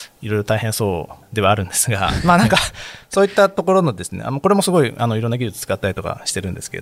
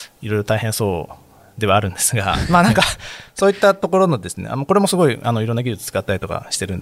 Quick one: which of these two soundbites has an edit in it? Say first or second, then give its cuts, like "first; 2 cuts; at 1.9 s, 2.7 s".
first; 1 cut; at 1.2 s